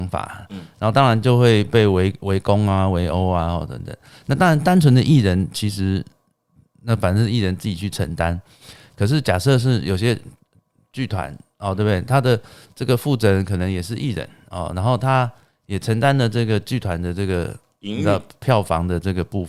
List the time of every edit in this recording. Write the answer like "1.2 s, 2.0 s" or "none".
none